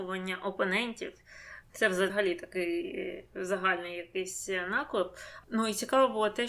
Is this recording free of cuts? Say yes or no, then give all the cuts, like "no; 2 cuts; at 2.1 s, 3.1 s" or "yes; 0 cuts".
no; 1 cut; at 1.6 s